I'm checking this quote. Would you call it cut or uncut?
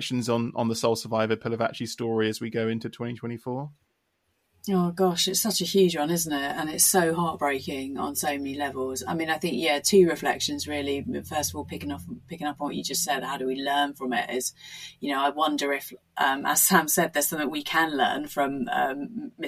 uncut